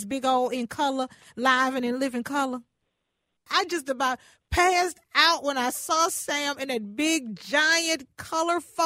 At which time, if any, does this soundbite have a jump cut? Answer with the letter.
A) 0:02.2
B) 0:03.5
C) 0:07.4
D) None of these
B